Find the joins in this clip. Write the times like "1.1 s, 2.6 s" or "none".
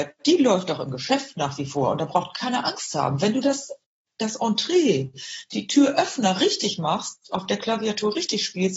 none